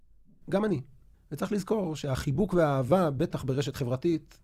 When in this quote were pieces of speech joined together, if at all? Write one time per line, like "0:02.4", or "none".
none